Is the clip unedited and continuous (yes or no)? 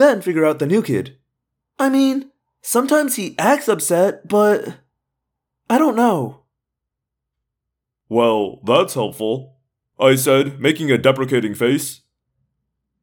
no